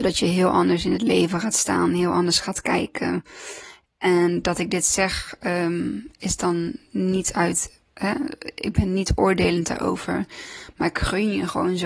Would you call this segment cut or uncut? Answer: uncut